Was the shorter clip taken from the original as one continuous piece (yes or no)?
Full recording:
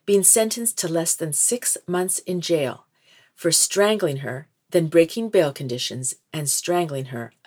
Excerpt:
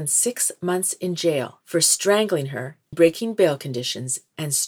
no